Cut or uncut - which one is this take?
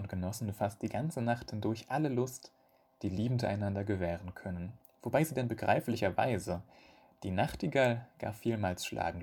uncut